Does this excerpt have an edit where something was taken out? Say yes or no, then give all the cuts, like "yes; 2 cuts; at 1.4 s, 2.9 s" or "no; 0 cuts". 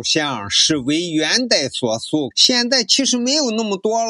yes; 1 cut; at 2.3 s